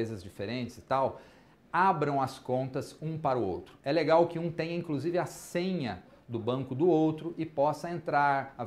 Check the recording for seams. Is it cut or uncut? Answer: uncut